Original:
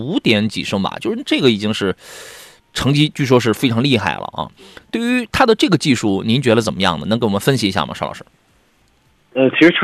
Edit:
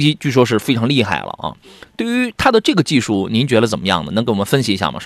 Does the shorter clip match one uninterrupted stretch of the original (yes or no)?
yes